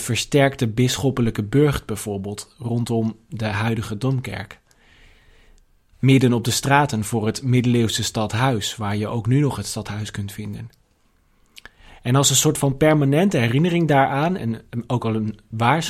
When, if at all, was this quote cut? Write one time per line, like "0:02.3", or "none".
none